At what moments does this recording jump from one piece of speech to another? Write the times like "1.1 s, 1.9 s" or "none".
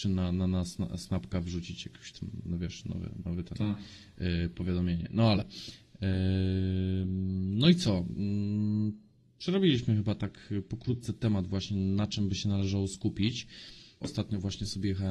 14.0 s